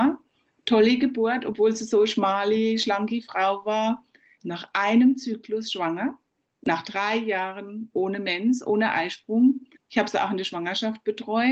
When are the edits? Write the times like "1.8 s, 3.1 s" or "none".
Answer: 4.4 s, 9.8 s